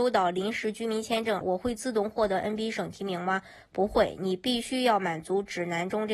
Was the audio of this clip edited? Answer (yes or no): yes